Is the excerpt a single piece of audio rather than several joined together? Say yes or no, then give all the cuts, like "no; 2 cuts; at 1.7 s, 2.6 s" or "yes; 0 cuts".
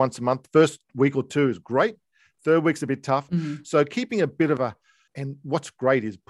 no; 2 cuts; at 3.3 s, 5.1 s